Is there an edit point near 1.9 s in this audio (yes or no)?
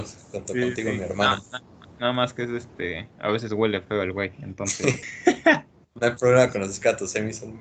no